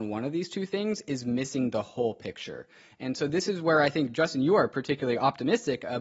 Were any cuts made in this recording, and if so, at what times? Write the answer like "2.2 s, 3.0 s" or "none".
none